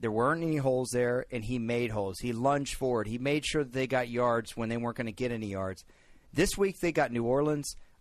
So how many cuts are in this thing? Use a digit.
0